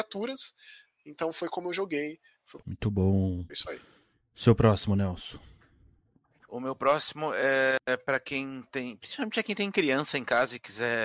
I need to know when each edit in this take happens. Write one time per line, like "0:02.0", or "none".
0:02.6